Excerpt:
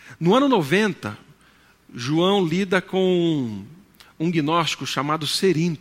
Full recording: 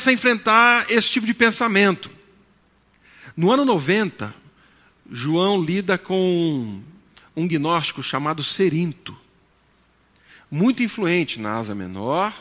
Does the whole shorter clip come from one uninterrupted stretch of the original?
yes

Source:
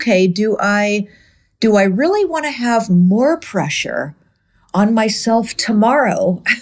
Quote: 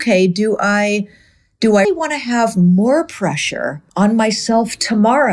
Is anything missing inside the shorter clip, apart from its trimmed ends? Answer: yes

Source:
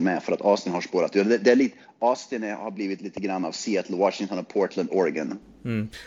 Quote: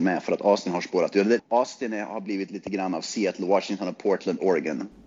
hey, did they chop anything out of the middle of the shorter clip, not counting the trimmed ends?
yes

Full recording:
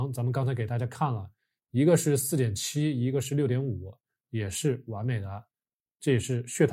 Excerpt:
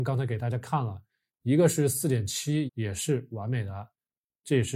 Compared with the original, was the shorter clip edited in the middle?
yes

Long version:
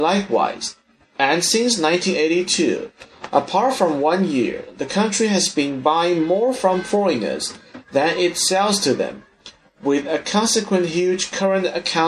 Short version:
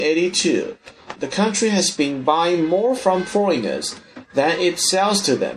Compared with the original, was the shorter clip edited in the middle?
yes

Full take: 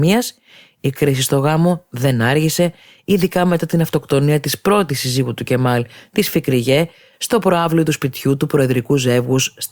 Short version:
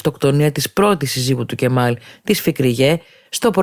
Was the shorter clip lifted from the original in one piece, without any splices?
yes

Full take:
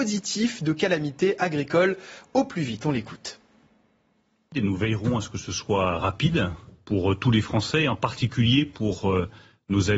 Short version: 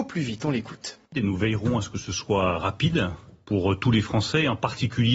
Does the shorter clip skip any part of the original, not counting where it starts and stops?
yes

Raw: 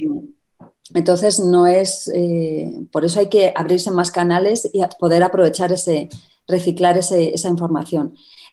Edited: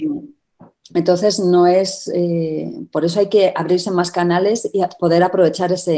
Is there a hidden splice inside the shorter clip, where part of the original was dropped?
no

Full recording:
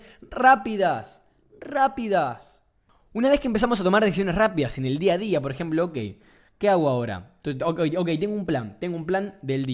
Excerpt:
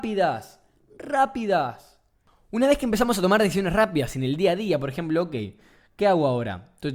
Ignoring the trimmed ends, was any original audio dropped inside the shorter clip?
no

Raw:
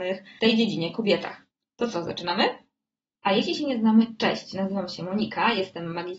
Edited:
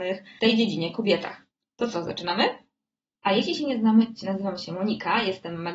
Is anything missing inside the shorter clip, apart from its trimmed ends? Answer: yes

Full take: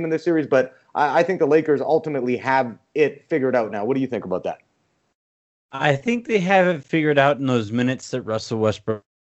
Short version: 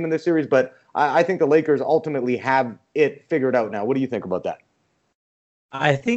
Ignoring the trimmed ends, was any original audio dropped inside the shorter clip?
no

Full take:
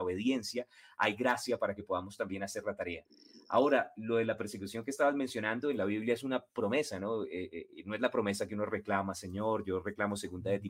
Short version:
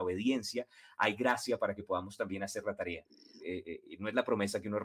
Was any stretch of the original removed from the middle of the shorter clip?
yes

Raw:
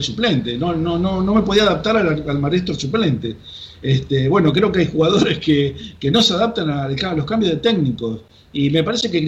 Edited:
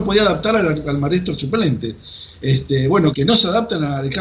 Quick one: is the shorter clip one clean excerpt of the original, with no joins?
no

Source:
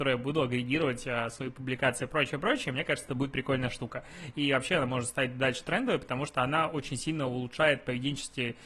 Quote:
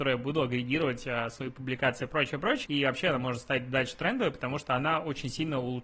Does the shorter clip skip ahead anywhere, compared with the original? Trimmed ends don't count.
yes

